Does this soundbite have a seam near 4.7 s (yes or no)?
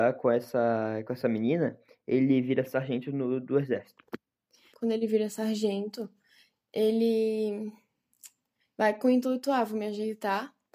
yes